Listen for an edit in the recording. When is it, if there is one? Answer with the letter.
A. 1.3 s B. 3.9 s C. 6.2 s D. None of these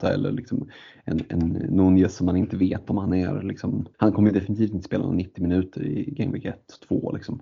B